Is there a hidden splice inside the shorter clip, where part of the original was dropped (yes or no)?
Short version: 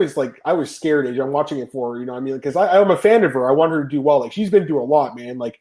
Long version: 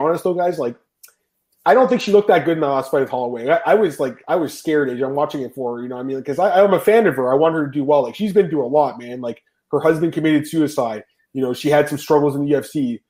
no